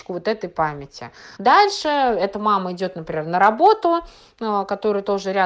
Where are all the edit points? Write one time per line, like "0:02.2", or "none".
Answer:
0:01.4